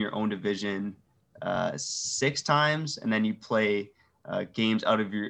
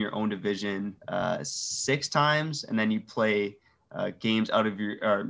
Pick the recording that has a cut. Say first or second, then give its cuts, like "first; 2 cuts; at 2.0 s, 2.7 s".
second; 1 cut; at 1.0 s